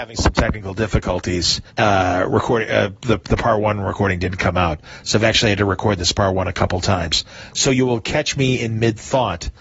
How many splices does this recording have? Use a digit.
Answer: 1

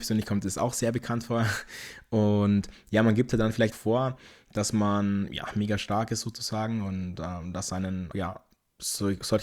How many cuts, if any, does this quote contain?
3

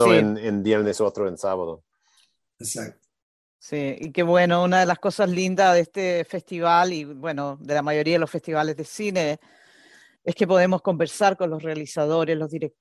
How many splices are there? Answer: 0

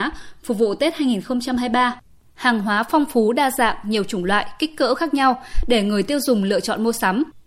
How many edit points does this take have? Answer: 0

